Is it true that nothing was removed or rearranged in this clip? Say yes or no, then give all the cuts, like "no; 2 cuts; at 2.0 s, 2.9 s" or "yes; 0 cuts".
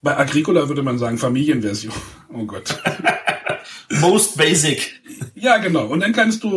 yes; 0 cuts